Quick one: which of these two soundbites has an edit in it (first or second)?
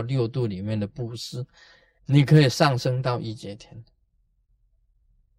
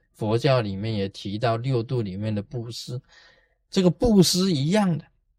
first